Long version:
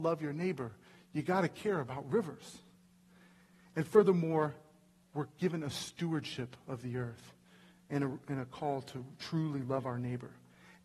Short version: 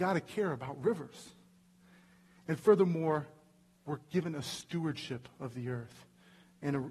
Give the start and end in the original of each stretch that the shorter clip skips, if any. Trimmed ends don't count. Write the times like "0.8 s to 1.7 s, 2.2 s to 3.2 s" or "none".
none